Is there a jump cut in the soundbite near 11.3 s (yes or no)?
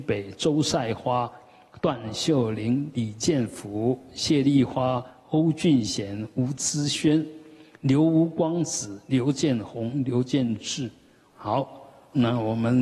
yes